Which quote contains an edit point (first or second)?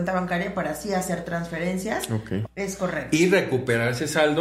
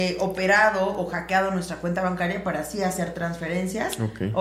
first